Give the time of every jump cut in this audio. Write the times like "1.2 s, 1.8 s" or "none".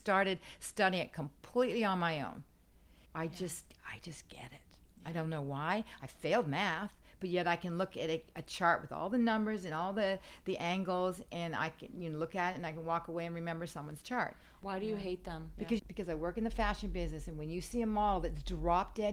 3.1 s, 14.6 s, 15.8 s